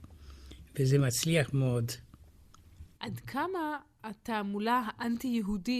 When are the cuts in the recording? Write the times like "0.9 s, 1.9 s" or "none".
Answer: 3.0 s